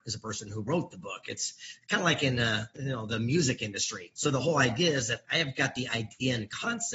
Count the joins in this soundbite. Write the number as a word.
one